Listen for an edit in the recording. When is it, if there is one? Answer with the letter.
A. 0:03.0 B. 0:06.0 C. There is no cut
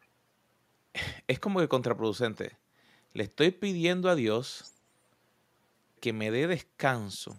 B